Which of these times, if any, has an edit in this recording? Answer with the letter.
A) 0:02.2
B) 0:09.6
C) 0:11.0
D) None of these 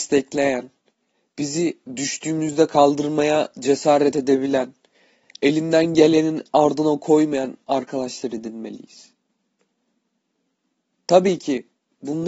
D